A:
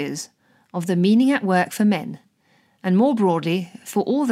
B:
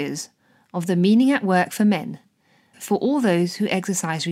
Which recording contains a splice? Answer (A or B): B